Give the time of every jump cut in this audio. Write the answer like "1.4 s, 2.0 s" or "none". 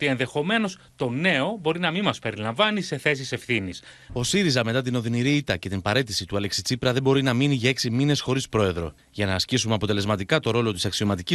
4.1 s